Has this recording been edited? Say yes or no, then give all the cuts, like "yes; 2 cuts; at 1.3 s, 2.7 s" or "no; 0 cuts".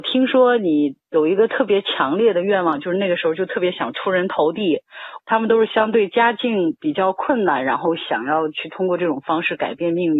yes; 1 cut; at 5.2 s